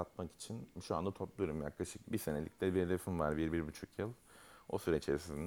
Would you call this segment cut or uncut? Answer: cut